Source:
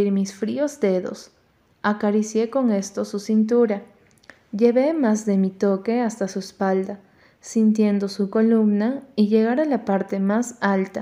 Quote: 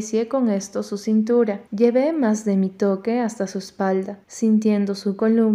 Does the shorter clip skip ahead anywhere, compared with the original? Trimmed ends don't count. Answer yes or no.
yes